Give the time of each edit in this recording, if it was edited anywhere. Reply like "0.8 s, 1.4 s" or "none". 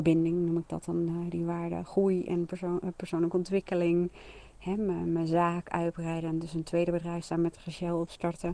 none